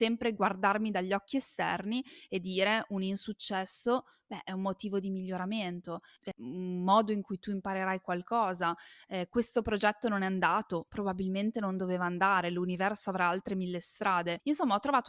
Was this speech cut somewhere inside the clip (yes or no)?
yes